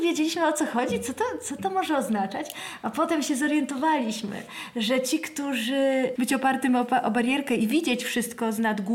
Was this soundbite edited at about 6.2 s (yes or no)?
yes